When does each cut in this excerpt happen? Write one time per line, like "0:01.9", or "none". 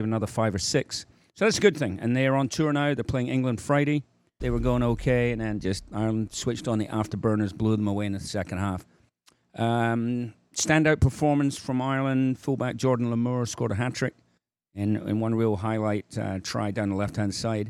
0:04.4